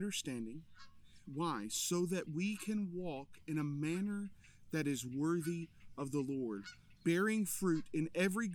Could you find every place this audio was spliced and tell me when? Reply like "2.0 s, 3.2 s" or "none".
1.2 s, 7.0 s

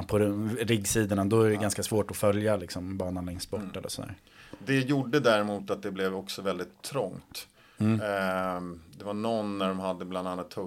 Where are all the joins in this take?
none

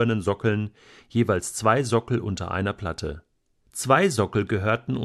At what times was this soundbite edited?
3.7 s

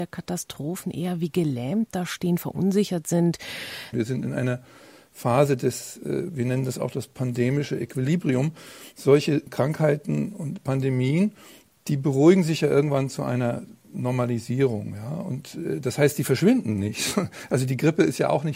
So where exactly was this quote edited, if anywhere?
3.9 s

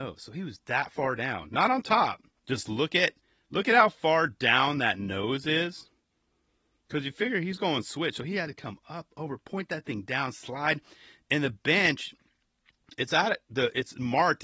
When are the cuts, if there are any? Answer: 2.4 s

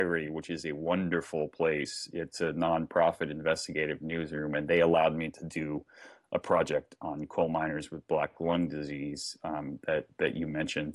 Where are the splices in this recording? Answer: none

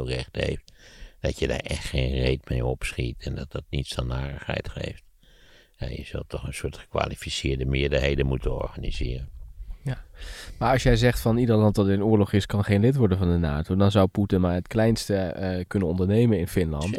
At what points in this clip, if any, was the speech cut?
none

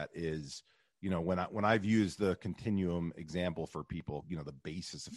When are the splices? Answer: 4.2 s

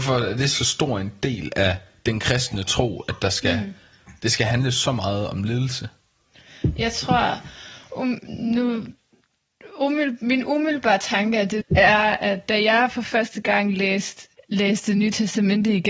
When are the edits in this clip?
11.6 s, 14.3 s

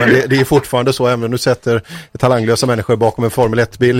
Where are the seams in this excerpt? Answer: none

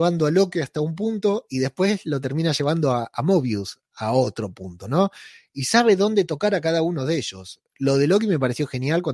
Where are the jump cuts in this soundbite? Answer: none

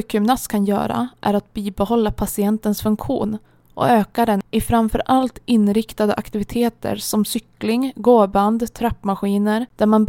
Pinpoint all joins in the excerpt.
none

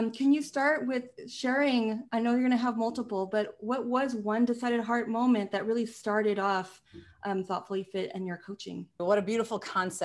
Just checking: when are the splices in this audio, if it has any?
9.0 s

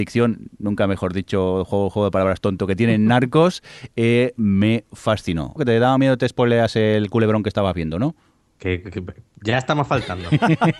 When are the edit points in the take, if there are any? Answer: 5.6 s

